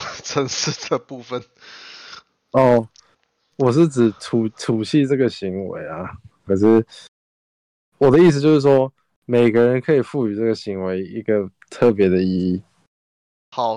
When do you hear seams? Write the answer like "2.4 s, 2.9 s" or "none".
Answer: 6.5 s

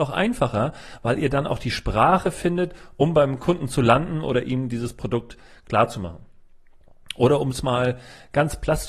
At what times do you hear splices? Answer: none

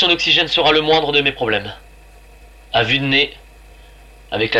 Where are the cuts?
none

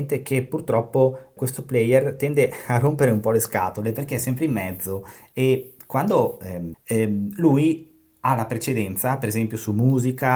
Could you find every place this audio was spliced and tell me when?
1.4 s, 6.7 s

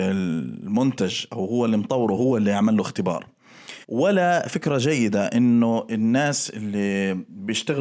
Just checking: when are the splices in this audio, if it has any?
3.8 s

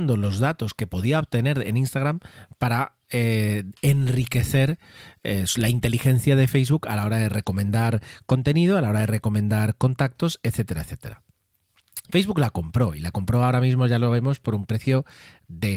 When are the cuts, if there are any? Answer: 12.1 s

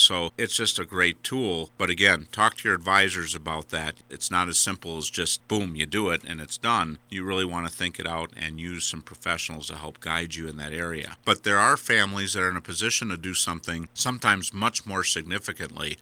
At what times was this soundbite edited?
11.2 s

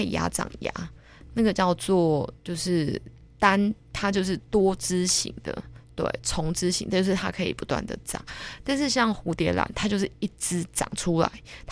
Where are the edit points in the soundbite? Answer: none

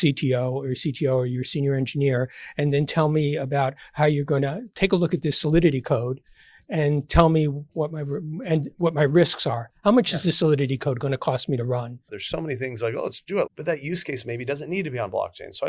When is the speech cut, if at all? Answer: 12.1 s, 13.5 s

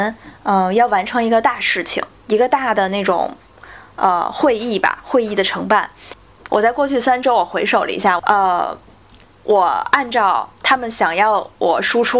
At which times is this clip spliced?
6.5 s, 8.2 s

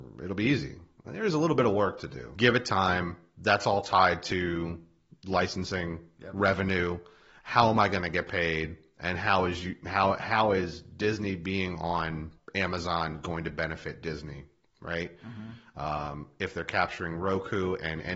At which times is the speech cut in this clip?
2.4 s, 12.4 s

